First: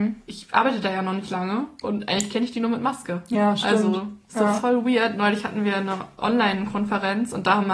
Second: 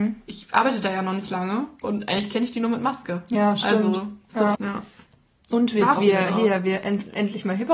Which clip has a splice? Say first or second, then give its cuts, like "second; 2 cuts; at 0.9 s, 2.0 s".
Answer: second; 2 cuts; at 4.5 s, 6.0 s